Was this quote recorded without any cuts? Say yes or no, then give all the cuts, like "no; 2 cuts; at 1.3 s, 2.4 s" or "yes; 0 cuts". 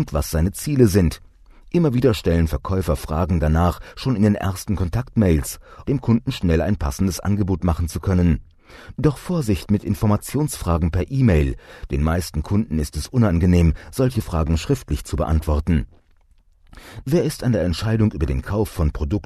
no; 2 cuts; at 5.8 s, 17.0 s